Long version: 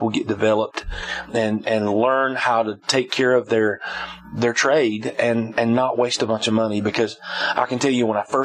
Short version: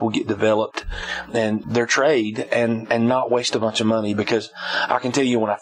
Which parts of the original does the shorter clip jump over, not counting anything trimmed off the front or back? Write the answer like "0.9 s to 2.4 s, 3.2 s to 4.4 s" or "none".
1.6 s to 4.3 s